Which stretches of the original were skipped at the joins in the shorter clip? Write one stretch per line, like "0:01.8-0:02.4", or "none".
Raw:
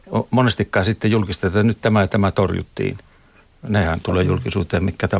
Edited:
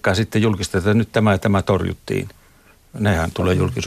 none